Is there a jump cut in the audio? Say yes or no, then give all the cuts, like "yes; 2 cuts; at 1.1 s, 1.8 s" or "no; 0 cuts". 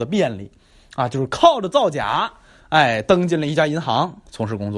no; 0 cuts